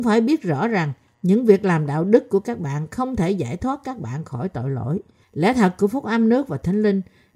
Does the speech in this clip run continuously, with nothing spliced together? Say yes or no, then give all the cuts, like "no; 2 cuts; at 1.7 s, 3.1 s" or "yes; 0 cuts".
no; 1 cut; at 5.2 s